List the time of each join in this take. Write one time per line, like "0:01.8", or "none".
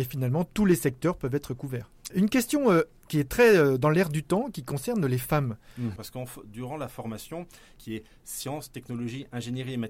0:02.1
0:06.0
0:07.8

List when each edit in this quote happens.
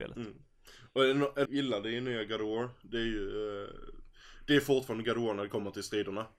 0:01.5

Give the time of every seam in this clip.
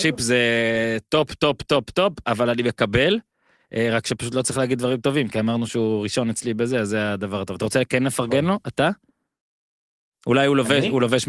none

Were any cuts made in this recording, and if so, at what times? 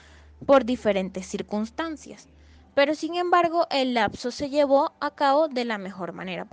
none

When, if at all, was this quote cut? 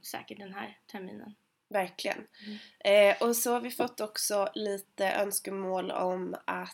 none

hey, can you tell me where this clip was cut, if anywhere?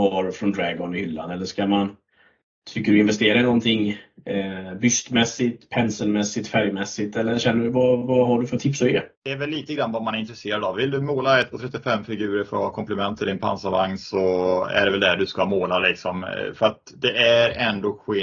0:09.1

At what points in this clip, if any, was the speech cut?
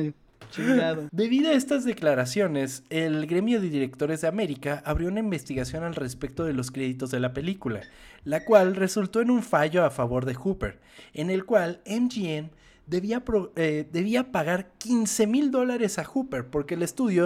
0:01.1

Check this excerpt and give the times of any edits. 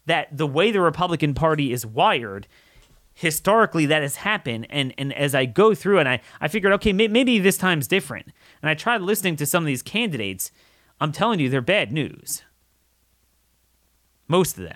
none

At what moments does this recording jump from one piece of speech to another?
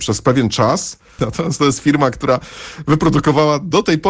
0:01.2

